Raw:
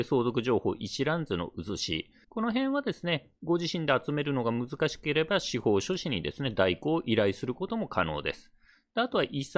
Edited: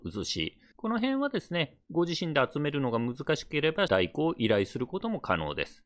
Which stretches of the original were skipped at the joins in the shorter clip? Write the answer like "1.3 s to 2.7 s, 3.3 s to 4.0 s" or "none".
5.4 s to 6.6 s